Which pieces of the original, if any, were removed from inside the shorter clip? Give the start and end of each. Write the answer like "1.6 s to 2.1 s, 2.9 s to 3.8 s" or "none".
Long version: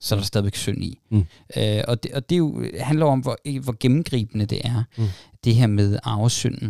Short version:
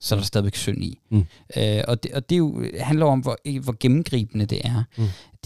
none